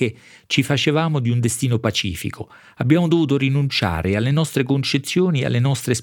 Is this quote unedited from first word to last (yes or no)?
yes